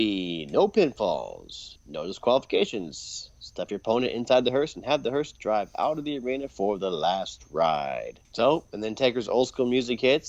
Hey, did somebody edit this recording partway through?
yes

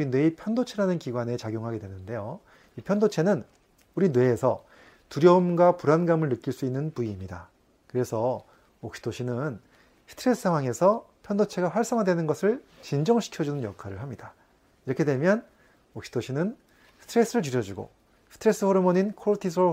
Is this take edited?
no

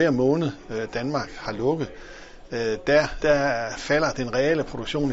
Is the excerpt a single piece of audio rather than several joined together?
no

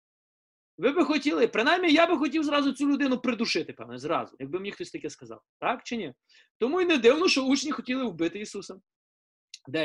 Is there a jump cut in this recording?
no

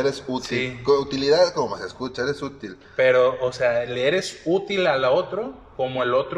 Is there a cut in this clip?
no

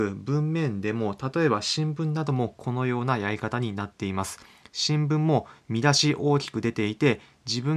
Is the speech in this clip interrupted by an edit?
no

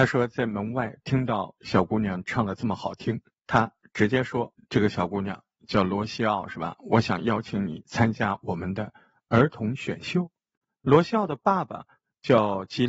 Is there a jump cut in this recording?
no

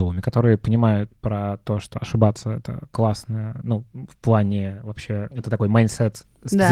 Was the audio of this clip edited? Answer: no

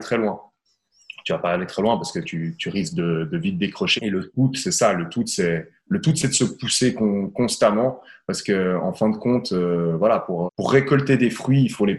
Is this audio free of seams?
no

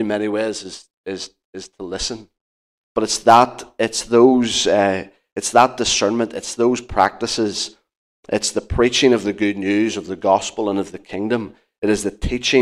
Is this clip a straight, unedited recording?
no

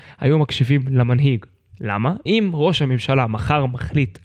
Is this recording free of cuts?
no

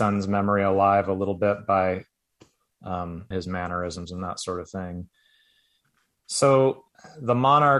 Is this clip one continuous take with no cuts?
no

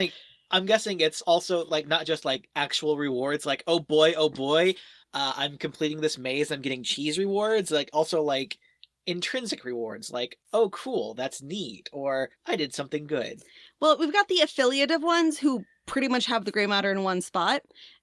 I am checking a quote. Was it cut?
no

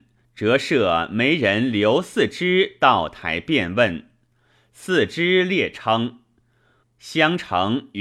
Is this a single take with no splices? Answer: no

